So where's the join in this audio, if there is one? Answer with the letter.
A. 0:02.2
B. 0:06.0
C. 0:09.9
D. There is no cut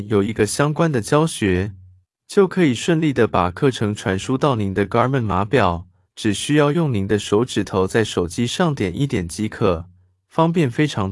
B